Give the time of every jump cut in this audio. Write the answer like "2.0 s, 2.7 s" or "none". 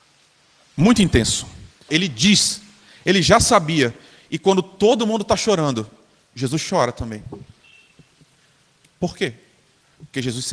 1.9 s